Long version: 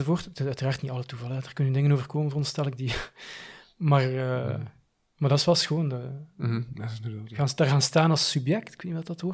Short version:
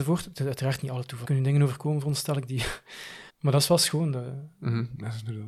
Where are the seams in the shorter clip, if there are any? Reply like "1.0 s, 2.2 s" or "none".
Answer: 1.2 s, 3.3 s